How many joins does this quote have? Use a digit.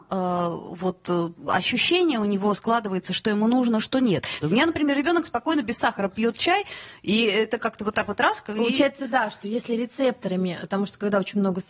2